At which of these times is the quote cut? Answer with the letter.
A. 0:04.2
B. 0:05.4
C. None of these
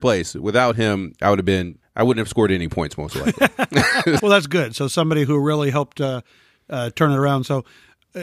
A